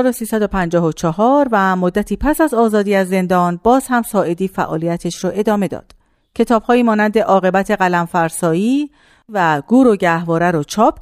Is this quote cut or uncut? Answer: uncut